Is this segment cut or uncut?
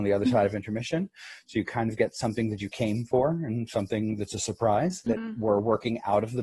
cut